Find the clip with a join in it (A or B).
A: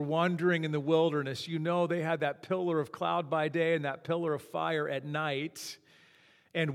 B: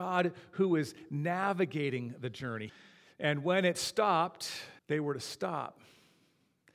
B